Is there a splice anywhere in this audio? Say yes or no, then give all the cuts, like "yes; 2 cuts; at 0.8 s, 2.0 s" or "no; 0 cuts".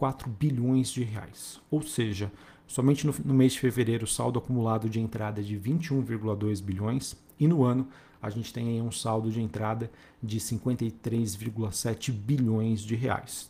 no; 0 cuts